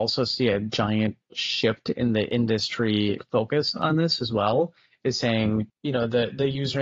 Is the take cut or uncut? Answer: uncut